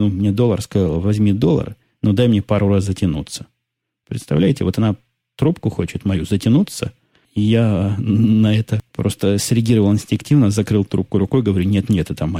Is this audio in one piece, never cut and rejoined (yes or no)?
yes